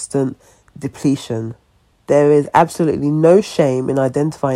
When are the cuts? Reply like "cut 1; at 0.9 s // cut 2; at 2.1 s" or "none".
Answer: none